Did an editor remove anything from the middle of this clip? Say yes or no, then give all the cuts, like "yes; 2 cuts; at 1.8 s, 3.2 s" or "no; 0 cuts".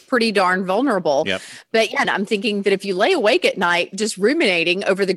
yes; 1 cut; at 2.0 s